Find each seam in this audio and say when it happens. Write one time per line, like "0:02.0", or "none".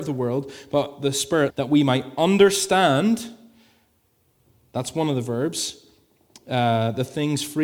0:01.5

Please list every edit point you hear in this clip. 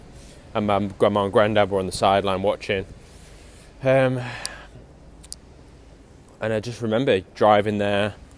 0:03.7

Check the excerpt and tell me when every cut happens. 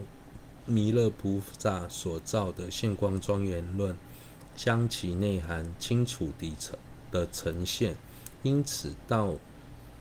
none

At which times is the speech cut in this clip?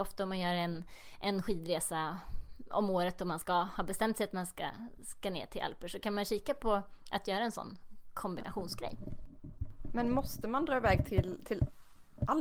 none

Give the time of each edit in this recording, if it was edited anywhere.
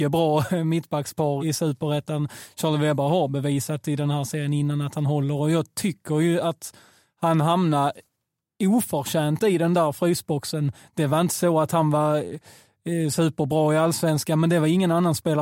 0:01.4

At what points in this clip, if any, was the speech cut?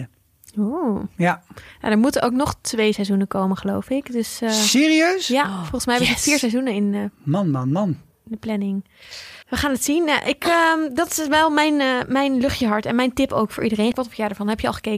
0:09.4
0:13.9

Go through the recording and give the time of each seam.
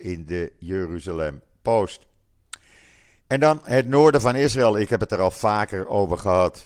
none

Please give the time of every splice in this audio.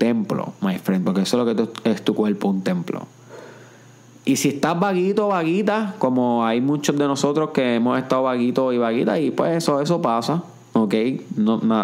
none

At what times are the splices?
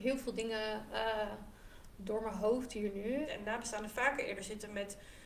0:03.2

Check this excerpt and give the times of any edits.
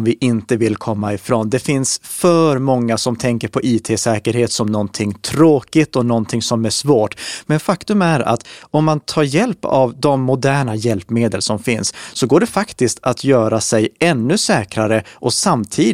none

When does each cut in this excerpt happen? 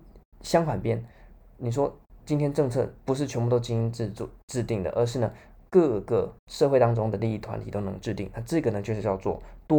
0:06.4

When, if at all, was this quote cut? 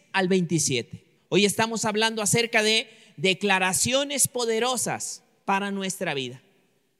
0:01.2

